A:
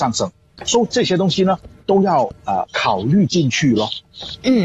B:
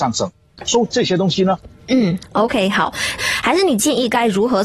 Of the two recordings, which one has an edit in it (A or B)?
B